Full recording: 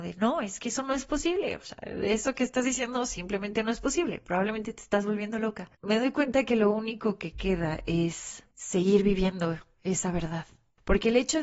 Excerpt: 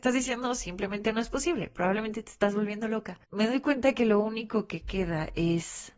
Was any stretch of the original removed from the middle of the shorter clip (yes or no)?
no